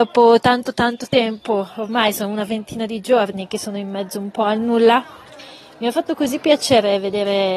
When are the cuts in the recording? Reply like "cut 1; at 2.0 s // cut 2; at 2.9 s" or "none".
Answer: none